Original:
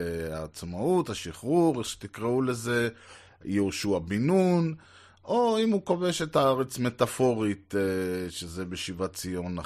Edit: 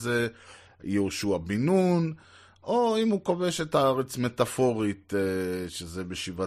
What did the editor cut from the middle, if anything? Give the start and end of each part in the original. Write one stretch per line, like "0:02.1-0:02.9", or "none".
none